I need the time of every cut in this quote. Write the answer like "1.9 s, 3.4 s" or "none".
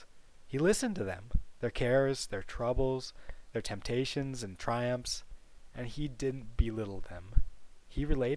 none